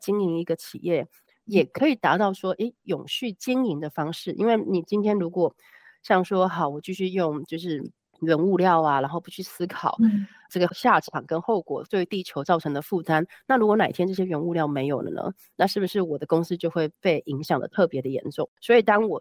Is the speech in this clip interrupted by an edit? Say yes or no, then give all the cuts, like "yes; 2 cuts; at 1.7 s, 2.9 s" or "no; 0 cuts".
no; 0 cuts